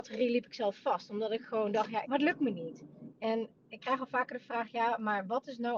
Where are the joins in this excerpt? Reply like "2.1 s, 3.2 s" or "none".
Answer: 2.0 s, 3.1 s